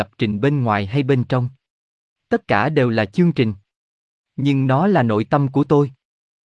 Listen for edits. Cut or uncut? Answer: uncut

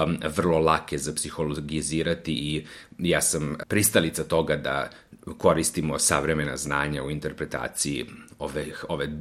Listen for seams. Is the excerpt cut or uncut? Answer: cut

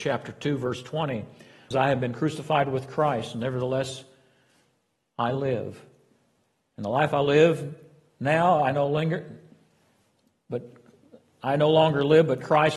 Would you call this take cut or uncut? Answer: cut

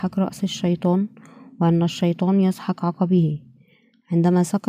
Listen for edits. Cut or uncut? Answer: uncut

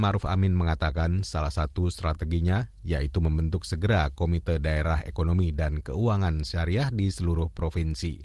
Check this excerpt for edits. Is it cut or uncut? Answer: uncut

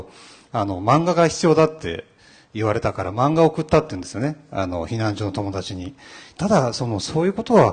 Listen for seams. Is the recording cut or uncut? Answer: cut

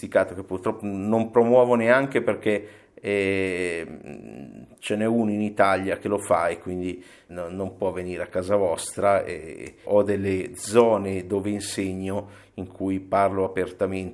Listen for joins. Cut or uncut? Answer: cut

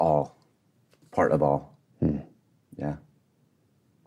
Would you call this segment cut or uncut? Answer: uncut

